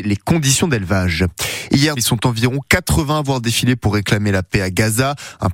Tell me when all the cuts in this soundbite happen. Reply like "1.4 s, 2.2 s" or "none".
2.0 s